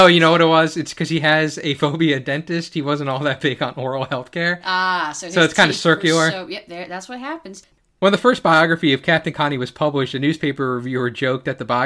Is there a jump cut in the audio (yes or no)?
no